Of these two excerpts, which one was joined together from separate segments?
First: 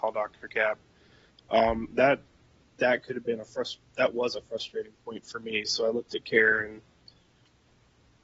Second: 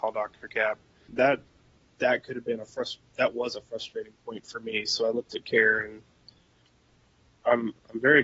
second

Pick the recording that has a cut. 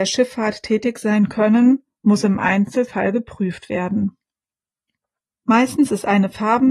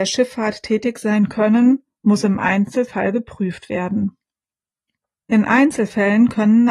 second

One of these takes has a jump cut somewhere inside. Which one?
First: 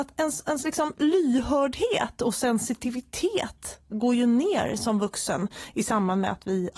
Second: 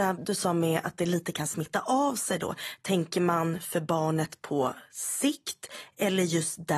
first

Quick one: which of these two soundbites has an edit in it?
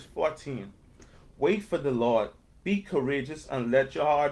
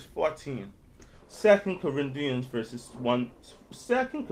second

